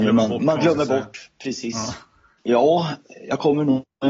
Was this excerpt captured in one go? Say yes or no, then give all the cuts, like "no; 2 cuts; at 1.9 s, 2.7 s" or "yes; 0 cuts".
no; 1 cut; at 2.4 s